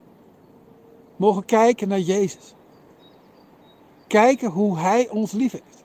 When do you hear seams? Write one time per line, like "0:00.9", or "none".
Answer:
none